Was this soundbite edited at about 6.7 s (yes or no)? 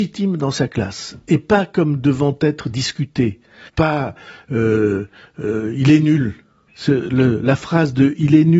yes